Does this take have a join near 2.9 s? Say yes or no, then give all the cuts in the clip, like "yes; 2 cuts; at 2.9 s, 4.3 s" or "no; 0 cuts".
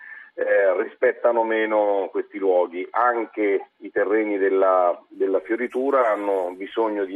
no; 0 cuts